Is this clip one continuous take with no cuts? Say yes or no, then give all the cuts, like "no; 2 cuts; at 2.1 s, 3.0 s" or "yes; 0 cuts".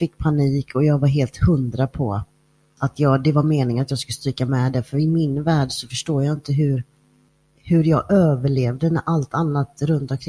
yes; 0 cuts